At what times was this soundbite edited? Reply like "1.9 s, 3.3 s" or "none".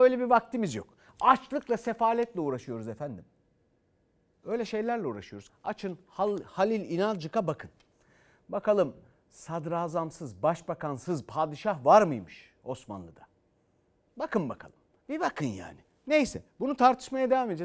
5.5 s, 15.0 s